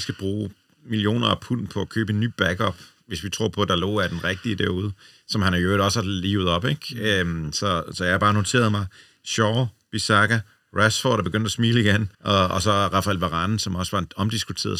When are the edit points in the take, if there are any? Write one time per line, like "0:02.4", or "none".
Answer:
0:12.1